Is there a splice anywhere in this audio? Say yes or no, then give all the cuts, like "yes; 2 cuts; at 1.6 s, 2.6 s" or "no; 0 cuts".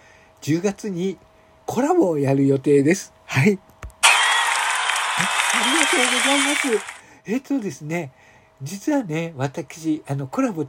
no; 0 cuts